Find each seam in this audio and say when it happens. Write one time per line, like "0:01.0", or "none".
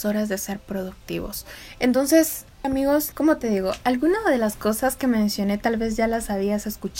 0:02.6